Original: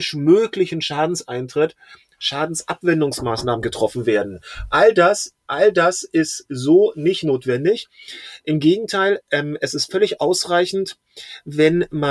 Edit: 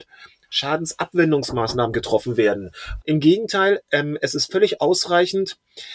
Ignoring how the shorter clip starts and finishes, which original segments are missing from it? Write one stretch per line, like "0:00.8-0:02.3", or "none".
0:04.7-0:08.4

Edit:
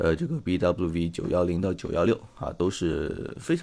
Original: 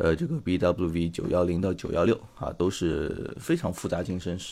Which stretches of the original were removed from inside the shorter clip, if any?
none

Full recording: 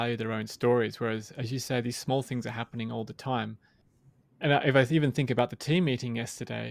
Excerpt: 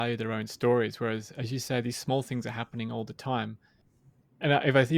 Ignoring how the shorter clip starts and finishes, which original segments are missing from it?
none

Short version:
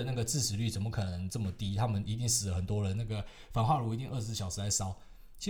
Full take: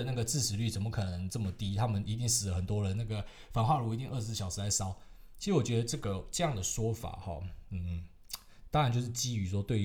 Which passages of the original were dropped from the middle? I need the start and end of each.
none

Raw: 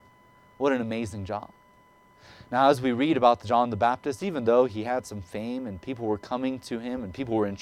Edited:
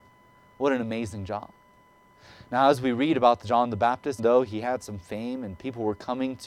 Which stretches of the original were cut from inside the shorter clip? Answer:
0:04.2-0:04.4

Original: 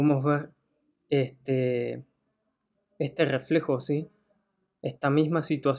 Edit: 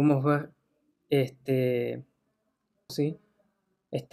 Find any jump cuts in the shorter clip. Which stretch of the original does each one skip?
0:02.9-0:03.8

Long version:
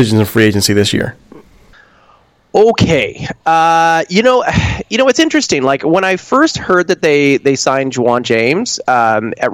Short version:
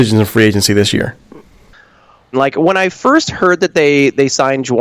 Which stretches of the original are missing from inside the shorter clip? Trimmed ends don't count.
0:02.3-0:05.6

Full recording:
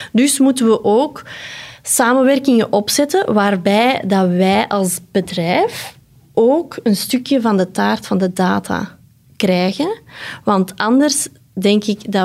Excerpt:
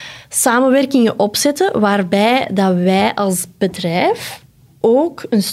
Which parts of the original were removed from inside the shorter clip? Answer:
none

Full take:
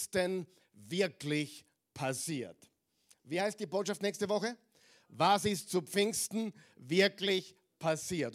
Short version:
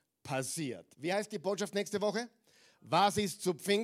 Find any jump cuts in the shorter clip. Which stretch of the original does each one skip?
0:02.6-0:03.2

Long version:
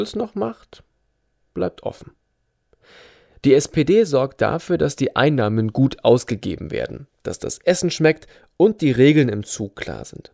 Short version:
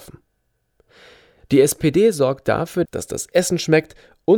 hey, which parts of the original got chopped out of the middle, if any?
0:04.8-0:07.2

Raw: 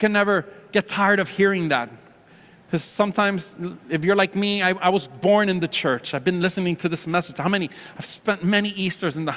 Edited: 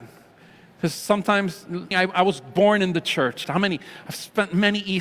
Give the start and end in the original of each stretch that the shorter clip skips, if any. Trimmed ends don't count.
0:03.8-0:04.6
0:06.1-0:07.3

